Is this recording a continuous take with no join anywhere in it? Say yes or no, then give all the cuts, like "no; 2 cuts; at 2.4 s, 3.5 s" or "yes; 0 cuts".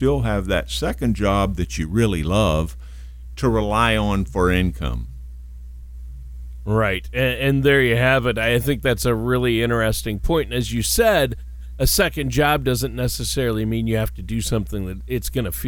yes; 0 cuts